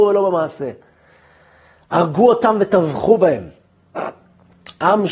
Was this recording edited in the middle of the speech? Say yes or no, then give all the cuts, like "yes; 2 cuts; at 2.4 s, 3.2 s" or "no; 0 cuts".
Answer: no; 0 cuts